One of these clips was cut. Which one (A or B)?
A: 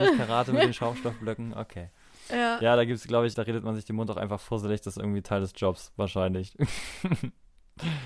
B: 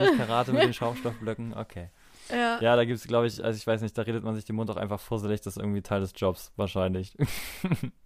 A